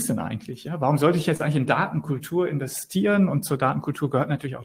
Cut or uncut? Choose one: uncut